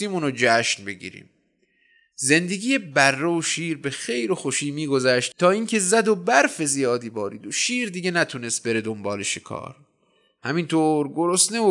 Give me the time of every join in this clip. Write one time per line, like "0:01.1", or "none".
none